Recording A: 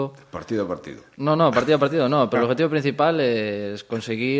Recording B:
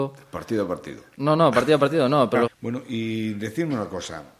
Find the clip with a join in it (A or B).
B